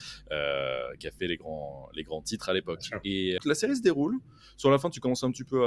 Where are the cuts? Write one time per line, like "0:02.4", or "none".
0:03.4